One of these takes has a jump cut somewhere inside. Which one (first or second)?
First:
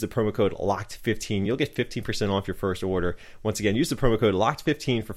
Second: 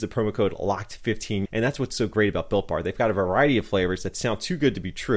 second